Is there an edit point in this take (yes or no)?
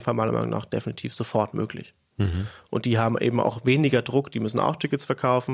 no